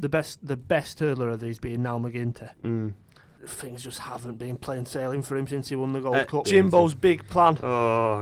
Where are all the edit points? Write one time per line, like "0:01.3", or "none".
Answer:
0:03.4
0:06.4

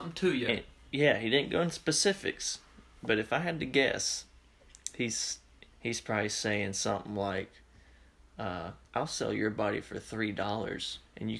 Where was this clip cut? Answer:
0:05.7
0:08.8

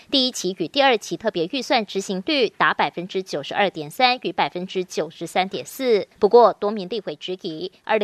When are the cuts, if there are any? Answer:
0:06.1

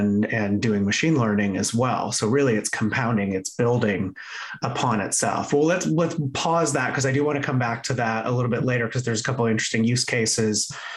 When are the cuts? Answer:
none

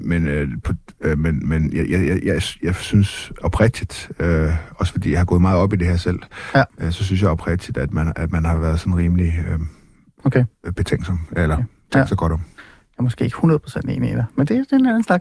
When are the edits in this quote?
none

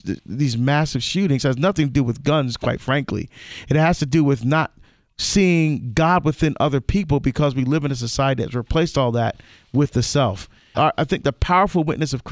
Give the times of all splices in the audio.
0:10.7

